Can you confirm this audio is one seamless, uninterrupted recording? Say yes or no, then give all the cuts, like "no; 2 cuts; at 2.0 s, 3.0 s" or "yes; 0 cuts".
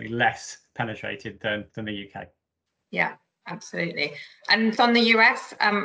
no; 1 cut; at 4.8 s